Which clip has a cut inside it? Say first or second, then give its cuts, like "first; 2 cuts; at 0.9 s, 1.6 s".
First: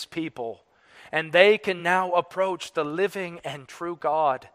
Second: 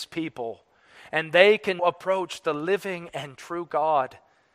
second; 1 cut; at 1.8 s